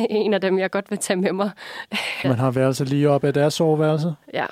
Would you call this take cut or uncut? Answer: cut